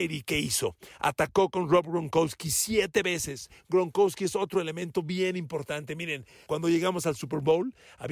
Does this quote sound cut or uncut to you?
cut